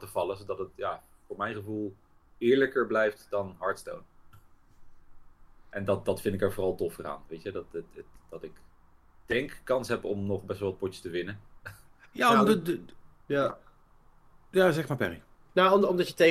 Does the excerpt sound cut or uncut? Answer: uncut